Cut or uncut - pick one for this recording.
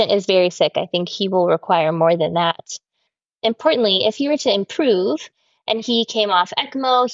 uncut